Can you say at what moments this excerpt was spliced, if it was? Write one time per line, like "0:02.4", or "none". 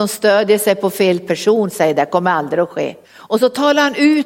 0:03.0